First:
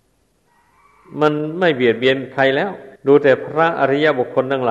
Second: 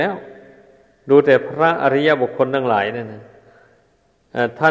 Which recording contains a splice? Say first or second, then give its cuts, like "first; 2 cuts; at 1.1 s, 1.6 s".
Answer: first; 1 cut; at 3.0 s